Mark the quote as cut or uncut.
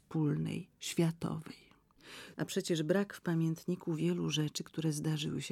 cut